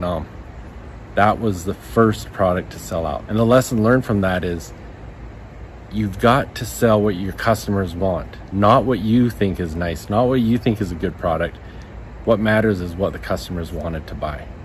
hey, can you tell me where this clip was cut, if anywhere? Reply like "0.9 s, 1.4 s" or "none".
3.3 s, 12.2 s

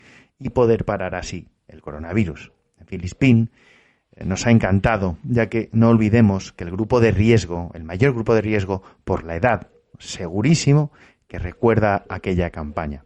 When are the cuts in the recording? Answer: 9.9 s

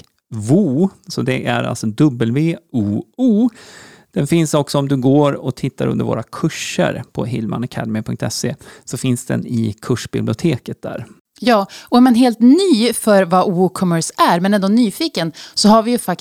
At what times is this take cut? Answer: none

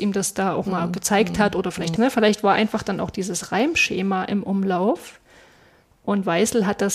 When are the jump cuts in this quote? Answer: 2.0 s

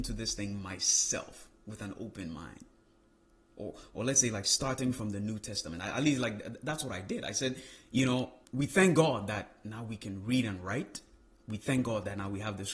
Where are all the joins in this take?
8.4 s

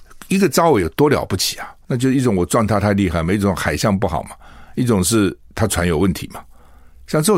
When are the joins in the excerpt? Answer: 1.8 s

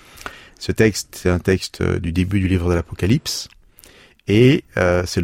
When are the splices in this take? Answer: none

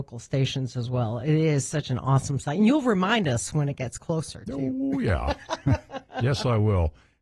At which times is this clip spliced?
none

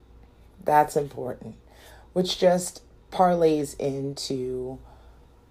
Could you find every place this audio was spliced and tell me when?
none

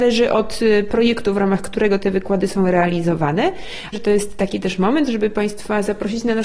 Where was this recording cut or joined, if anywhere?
3.9 s

